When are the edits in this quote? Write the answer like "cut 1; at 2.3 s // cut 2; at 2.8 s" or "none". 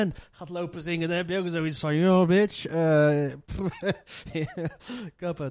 none